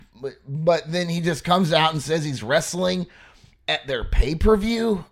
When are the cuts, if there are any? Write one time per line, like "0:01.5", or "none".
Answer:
none